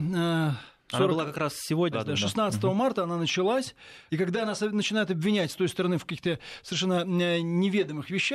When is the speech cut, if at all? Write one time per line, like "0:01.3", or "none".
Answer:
0:01.9
0:04.1